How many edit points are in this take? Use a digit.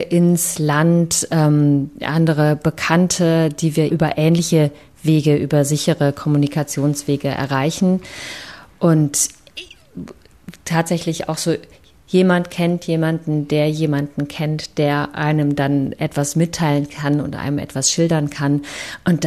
1